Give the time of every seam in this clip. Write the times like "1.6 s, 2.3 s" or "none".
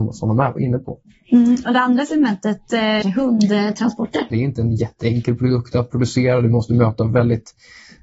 3.0 s, 4.3 s

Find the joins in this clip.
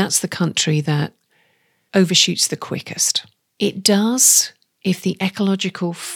3.5 s

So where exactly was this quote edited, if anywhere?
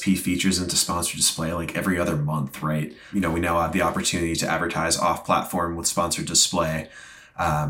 3.1 s

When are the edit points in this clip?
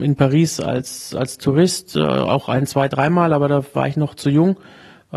none

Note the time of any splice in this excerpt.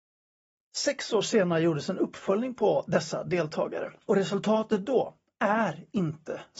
4.0 s

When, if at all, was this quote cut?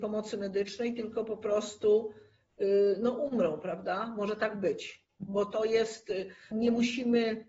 6.5 s

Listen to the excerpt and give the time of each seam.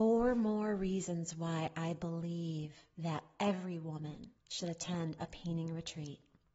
2.9 s, 4.4 s

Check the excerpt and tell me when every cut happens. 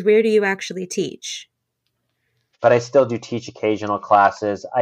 2.5 s

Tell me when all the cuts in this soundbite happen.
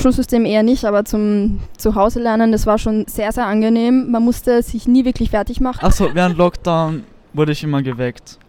5.8 s

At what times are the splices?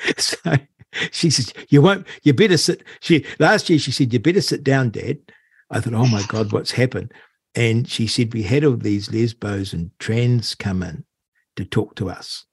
none

